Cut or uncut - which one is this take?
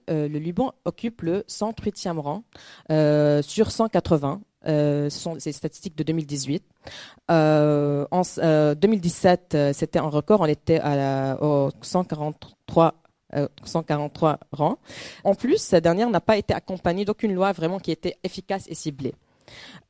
cut